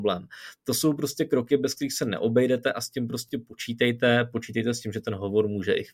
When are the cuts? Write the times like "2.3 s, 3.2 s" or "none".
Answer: none